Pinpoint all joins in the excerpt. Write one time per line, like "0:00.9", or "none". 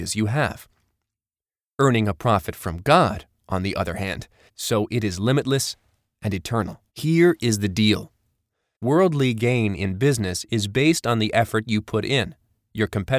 0:04.5
0:06.9
0:08.7